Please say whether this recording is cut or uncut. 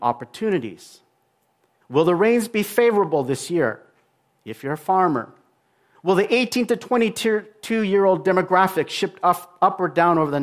cut